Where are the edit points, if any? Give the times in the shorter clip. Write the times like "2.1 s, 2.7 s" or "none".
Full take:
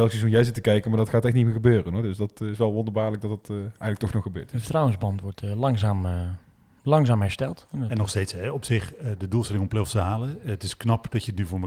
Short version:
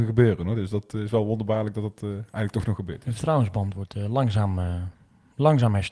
none

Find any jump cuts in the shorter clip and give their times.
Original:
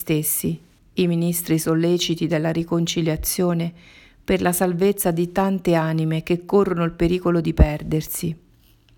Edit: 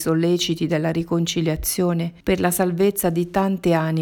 2.2 s

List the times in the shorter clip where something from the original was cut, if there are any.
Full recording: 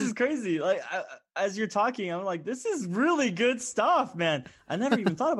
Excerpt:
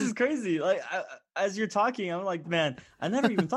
2.4 s

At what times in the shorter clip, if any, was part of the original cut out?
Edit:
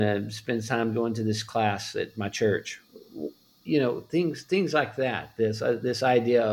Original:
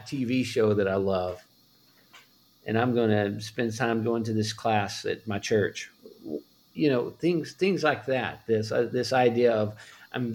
none

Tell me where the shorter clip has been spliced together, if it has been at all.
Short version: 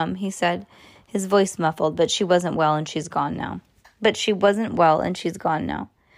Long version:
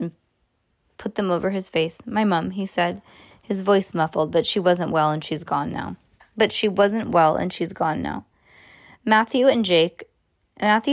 none

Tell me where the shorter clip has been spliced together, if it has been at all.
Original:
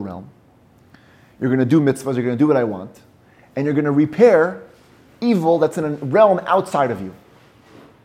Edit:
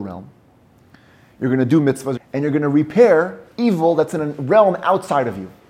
2.2 s, 3.5 s

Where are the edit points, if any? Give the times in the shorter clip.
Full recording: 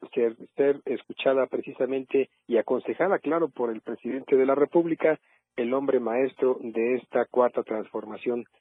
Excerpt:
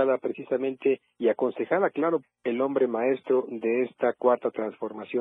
2.2 s

